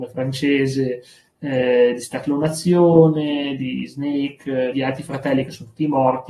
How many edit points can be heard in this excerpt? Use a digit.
1